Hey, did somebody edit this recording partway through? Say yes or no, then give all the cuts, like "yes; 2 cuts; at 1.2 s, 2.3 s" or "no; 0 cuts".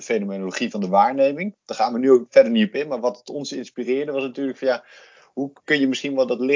no; 0 cuts